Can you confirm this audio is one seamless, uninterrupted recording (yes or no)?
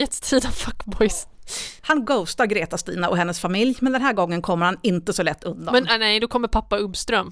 yes